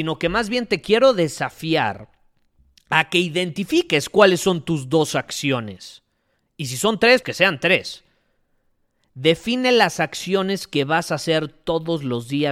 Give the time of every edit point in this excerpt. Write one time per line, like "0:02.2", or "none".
0:07.2